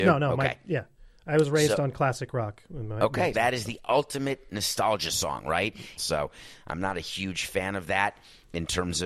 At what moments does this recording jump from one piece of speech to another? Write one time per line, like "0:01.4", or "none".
0:03.3
0:06.0

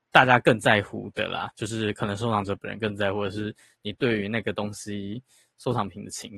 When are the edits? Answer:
none

